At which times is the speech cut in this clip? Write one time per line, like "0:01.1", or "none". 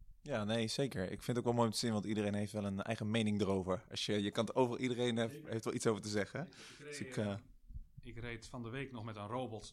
none